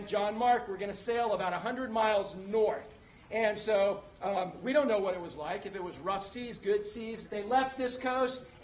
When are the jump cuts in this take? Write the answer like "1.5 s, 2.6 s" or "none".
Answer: 7.3 s